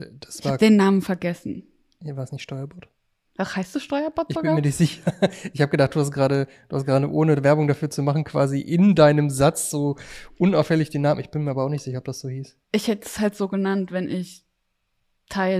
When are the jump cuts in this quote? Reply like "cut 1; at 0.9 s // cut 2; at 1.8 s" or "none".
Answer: none